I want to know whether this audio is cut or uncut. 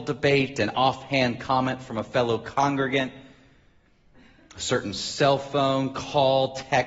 uncut